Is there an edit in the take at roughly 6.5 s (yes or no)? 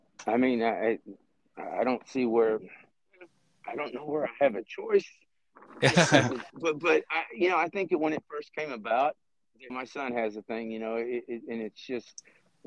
yes